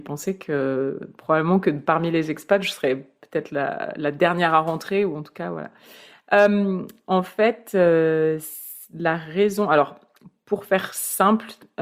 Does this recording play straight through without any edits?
yes; 0 cuts

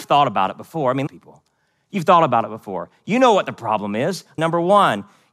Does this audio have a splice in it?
yes; 2 cuts; at 1.1 s, 4.4 s

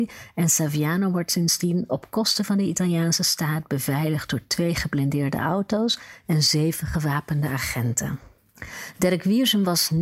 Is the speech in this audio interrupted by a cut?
no; 0 cuts

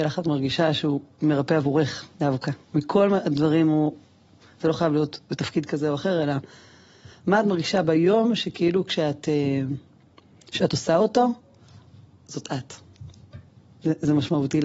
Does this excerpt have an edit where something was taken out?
no; 0 cuts

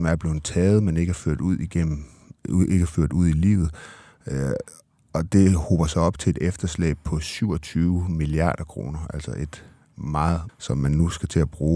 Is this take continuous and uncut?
no; 1 cut; at 10.5 s

